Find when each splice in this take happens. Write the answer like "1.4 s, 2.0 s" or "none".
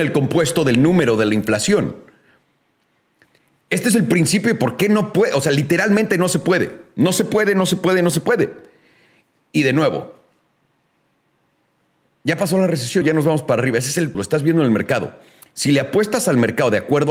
13.0 s, 14.1 s